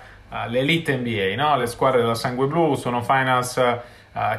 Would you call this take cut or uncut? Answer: uncut